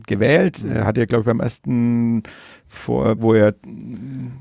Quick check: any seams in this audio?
yes; 1 cut; at 3.2 s

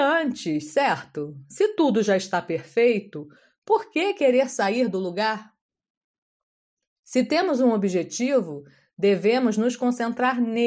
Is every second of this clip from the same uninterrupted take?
yes; 0 cuts

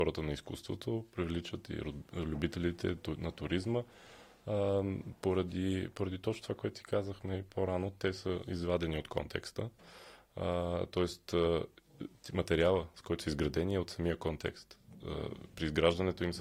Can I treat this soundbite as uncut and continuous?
yes; 0 cuts

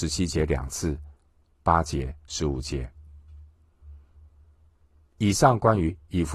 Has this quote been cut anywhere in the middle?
yes; 1 cut; at 1.5 s

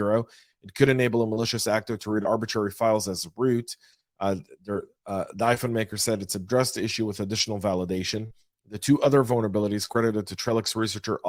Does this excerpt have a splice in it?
no; 0 cuts

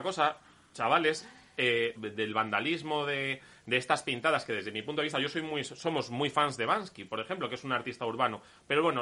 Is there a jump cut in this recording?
yes; 1 cut; at 1.9 s

